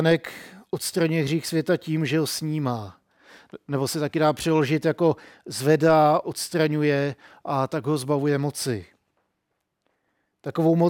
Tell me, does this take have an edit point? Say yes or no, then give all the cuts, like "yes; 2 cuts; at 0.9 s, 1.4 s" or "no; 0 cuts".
yes; 1 cut; at 6.2 s